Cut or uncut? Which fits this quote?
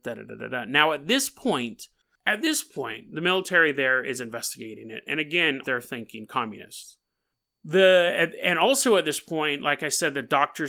cut